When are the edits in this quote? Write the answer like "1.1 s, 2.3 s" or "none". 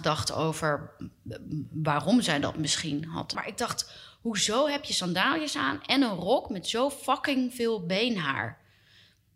3.3 s